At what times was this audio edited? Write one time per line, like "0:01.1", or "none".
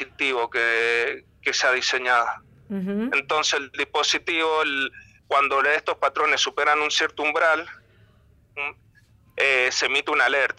none